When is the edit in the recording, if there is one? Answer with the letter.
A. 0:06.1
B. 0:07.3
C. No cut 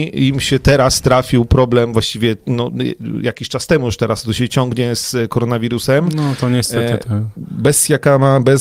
C